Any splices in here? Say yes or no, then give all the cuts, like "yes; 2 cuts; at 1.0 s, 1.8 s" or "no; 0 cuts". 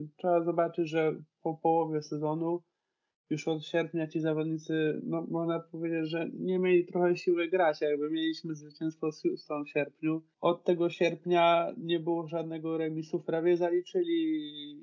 no; 0 cuts